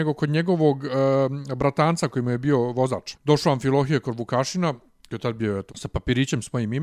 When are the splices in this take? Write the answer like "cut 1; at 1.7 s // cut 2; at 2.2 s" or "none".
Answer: cut 1; at 3.1 s // cut 2; at 5.7 s